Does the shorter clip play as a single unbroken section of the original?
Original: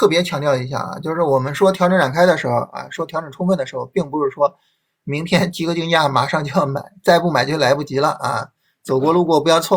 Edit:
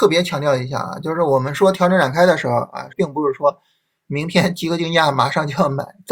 no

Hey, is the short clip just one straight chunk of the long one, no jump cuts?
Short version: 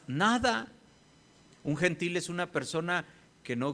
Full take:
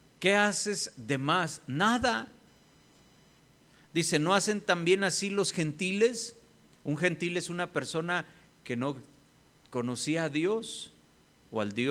no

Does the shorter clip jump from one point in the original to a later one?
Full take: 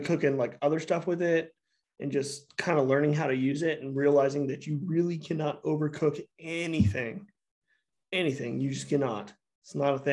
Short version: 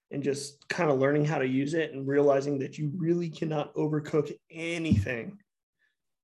no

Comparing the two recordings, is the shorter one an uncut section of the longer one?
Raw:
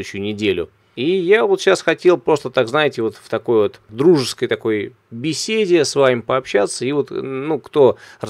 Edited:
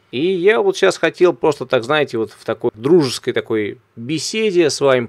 no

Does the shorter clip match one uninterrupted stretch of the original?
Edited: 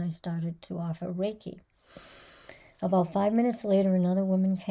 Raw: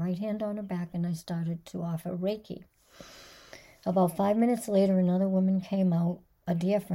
yes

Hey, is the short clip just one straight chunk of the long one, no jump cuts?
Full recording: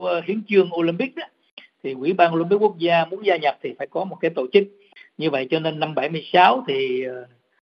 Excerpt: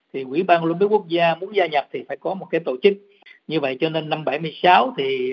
yes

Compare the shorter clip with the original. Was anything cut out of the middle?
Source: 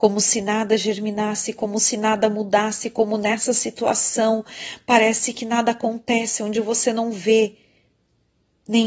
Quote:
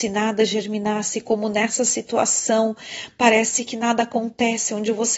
yes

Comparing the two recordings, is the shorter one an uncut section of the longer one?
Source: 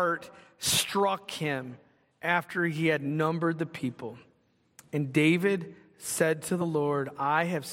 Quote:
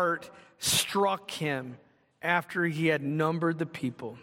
yes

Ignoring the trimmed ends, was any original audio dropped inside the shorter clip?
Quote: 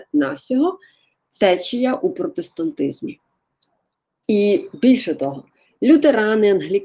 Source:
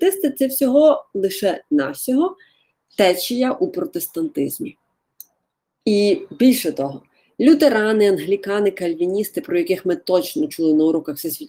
no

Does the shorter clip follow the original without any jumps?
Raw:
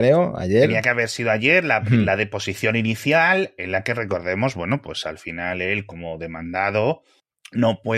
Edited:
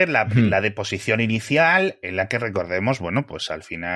yes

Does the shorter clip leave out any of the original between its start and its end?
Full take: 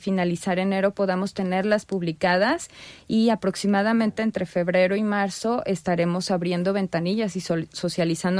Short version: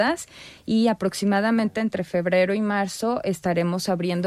no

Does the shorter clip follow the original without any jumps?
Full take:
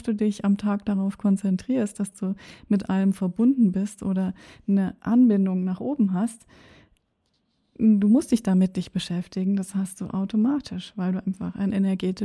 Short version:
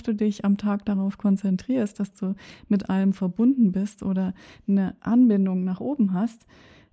yes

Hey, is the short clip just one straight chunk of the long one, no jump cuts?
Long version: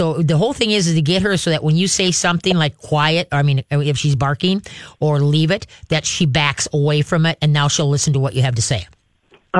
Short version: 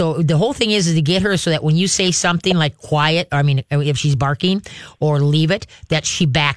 yes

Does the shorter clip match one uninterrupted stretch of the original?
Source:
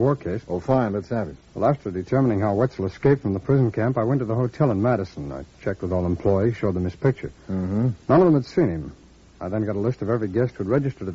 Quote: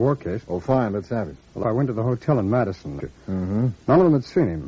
no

